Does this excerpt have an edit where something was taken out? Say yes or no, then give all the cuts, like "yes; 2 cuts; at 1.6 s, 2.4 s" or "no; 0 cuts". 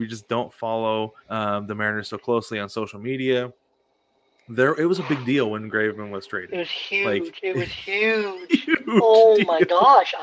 yes; 1 cut; at 1.2 s